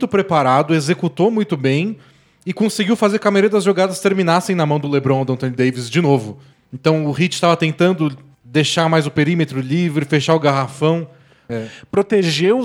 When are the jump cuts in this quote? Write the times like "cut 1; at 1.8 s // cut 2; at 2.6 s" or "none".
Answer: cut 1; at 11.5 s